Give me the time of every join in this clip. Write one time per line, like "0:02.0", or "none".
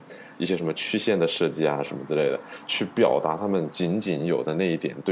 0:01.8